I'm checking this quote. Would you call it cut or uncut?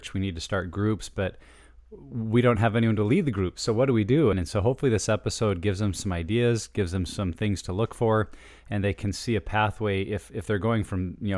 cut